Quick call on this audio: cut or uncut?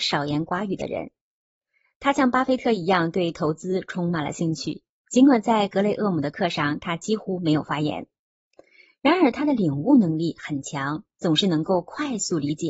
uncut